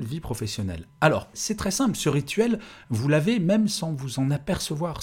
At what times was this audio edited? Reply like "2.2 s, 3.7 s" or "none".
1.3 s